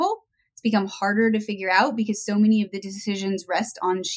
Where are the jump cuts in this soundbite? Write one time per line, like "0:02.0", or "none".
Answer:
none